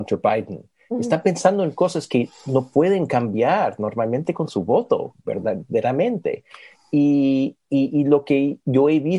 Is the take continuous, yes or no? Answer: yes